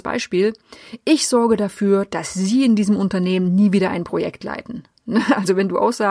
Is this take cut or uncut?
uncut